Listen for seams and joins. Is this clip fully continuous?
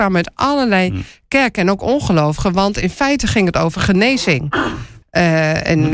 no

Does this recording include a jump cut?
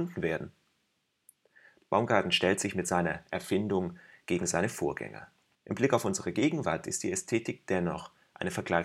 yes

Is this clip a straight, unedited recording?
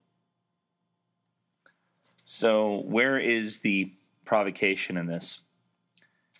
yes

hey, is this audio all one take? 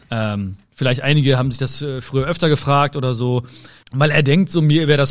no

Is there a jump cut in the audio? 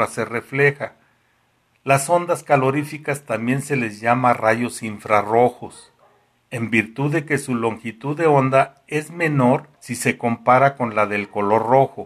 yes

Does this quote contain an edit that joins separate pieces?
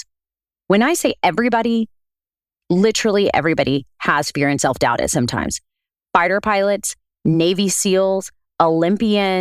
no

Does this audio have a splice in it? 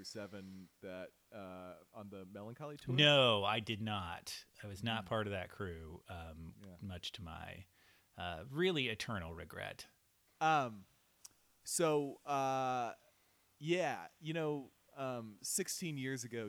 yes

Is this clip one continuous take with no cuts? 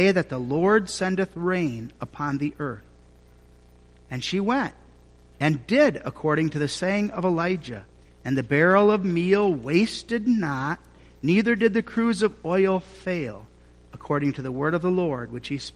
no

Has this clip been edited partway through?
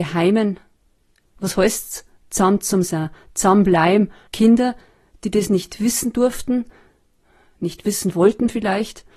yes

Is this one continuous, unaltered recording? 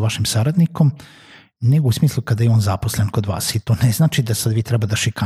yes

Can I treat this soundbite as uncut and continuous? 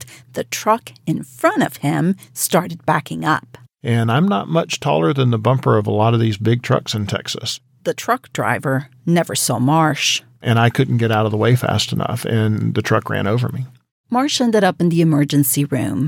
yes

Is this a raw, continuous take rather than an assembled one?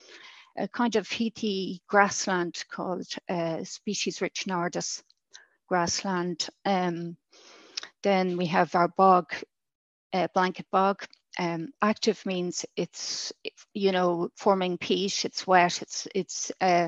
yes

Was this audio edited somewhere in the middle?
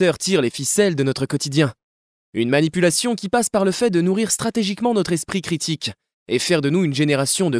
no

